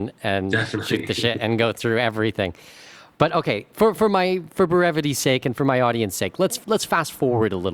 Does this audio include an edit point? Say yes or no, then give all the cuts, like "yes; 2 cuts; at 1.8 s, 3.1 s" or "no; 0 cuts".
no; 0 cuts